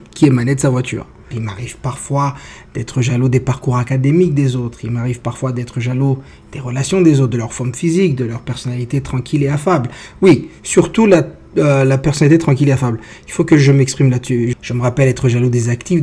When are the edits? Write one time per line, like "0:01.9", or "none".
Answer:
0:01.3
0:14.5